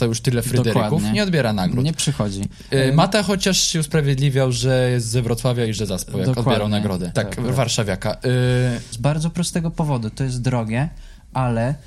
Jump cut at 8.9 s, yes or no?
yes